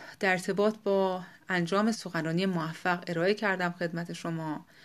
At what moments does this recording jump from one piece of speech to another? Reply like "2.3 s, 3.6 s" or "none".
1.9 s